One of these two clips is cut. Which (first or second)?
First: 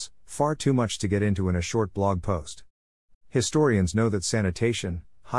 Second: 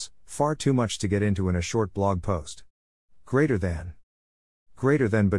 first